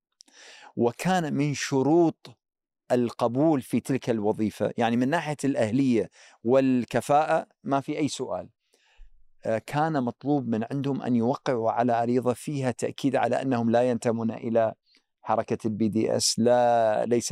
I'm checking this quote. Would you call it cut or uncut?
uncut